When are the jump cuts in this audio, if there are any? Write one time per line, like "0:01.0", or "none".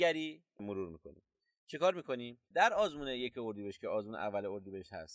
0:02.5